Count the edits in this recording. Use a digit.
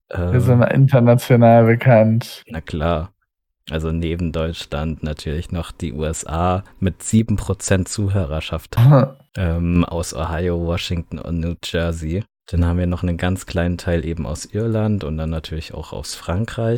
0